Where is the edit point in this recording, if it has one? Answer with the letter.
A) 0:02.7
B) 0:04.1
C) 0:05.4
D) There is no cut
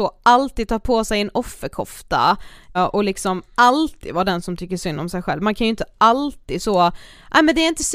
A